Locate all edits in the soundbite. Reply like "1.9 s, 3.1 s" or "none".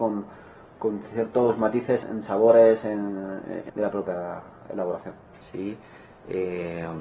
2.0 s, 3.7 s, 5.4 s